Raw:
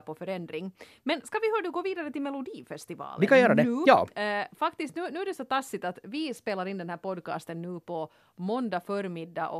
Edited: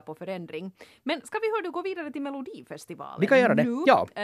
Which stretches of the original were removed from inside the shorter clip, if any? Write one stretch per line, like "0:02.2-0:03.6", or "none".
none